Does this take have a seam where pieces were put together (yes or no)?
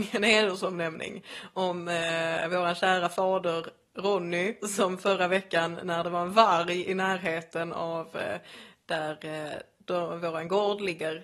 yes